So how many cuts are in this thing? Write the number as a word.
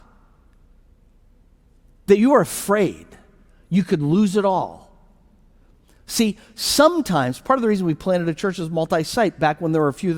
zero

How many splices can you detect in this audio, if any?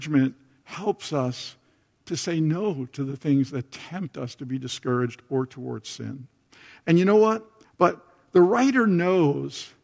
one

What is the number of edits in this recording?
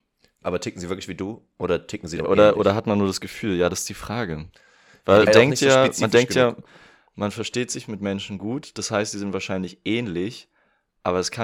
one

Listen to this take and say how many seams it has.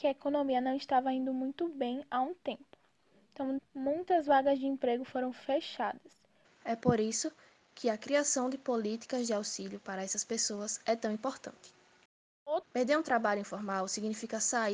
three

